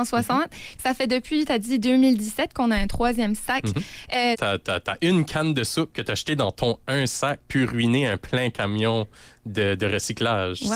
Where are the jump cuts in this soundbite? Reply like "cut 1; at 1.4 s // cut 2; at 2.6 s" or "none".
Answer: cut 1; at 4.3 s